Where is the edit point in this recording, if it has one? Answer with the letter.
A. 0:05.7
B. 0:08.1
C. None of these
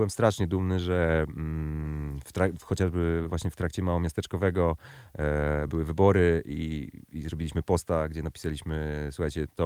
C